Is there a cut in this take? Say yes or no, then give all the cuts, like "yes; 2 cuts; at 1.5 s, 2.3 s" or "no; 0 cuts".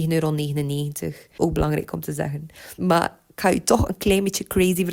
yes; 2 cuts; at 1.4 s, 2.8 s